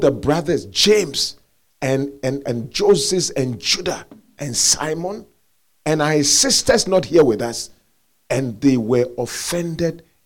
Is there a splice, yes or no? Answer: no